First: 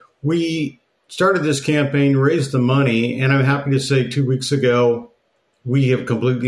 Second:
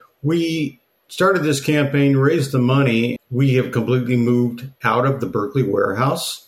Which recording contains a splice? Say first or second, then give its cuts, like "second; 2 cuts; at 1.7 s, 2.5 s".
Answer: second; 1 cut; at 3.2 s